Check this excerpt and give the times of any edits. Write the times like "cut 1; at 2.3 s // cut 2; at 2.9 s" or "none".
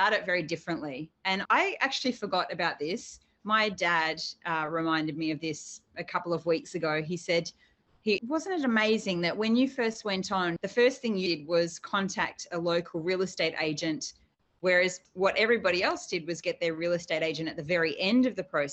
cut 1; at 8.2 s // cut 2; at 10.6 s